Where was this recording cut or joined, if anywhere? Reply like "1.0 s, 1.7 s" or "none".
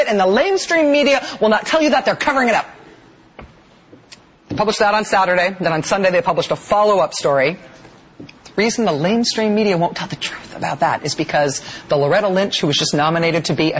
8.1 s